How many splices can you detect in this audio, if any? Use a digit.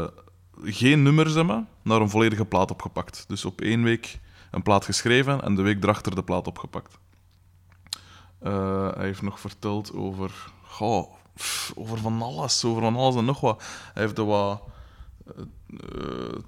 0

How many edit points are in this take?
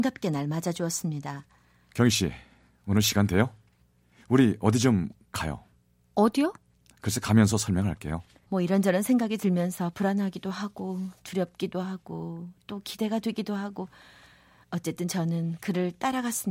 1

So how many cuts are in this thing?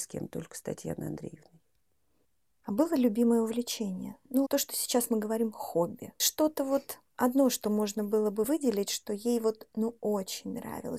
1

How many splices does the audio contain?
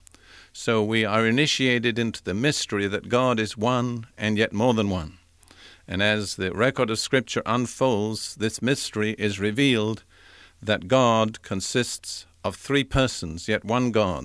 0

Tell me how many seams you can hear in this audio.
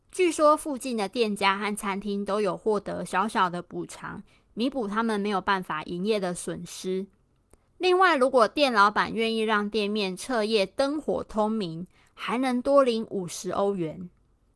0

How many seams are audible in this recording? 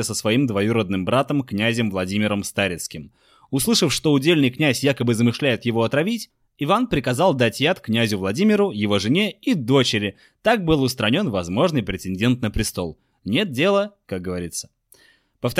1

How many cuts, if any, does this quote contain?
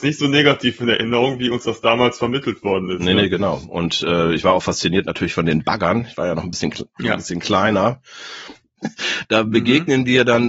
1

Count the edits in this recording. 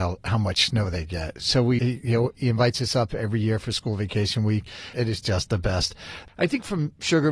3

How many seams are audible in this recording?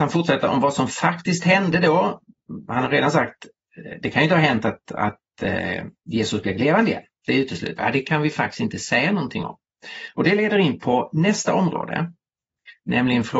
1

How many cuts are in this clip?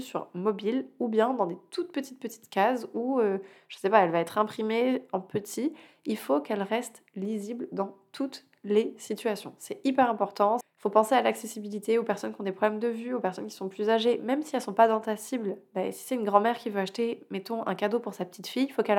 1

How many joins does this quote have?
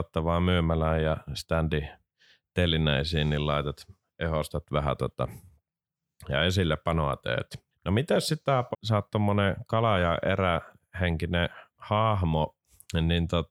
2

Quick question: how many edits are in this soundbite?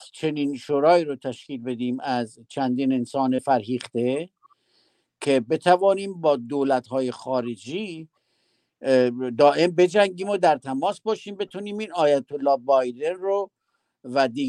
0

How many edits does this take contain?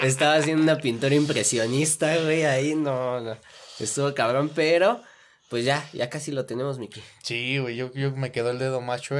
0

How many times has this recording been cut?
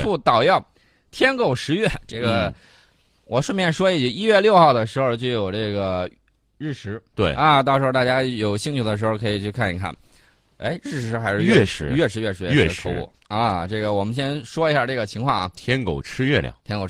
0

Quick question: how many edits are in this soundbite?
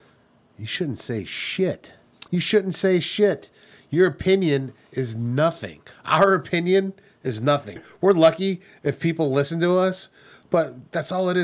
2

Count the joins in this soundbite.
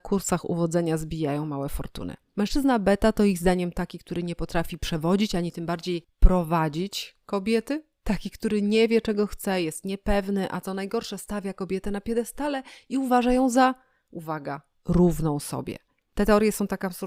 0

